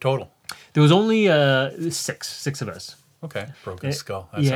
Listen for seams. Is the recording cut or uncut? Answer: cut